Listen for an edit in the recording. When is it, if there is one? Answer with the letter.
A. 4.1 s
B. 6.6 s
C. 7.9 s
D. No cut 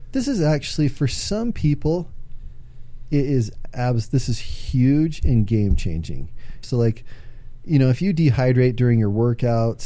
B